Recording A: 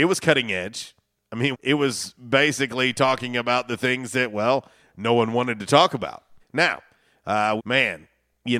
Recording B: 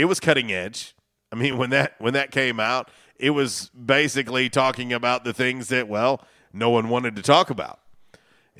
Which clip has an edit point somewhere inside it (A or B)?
A